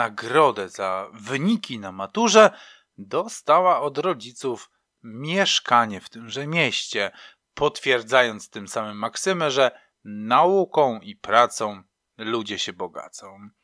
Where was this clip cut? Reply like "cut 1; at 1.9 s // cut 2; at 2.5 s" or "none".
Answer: none